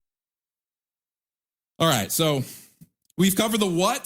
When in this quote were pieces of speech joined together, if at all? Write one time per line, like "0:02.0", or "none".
none